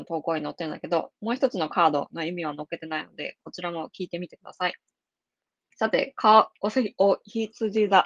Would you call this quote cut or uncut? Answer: uncut